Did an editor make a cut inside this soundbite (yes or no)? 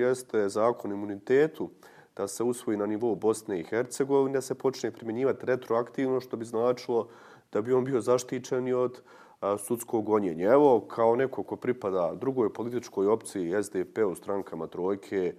no